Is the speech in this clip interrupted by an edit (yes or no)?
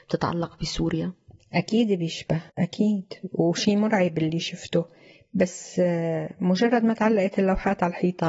yes